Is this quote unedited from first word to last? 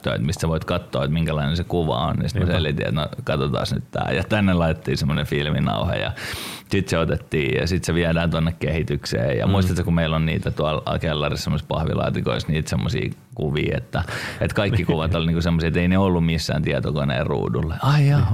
yes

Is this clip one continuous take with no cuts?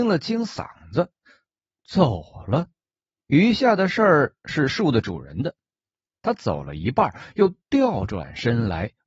yes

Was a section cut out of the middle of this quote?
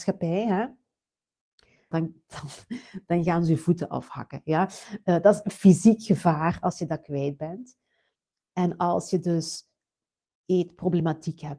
yes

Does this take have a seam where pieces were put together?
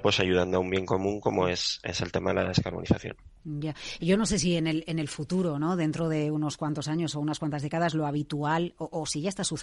no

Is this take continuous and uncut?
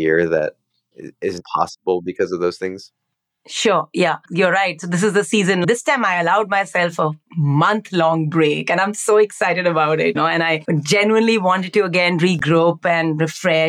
yes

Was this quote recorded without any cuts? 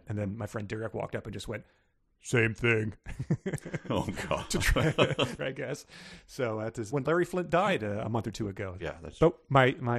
no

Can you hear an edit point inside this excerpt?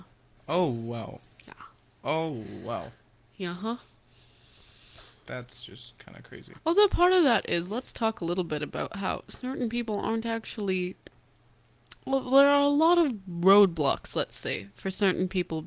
no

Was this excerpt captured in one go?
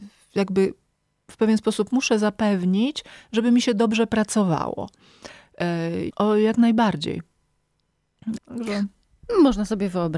no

